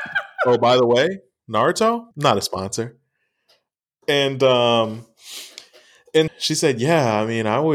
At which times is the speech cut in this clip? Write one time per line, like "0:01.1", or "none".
0:02.1
0:06.3